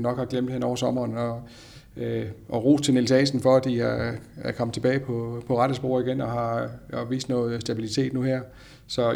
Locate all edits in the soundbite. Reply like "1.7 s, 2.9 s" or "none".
none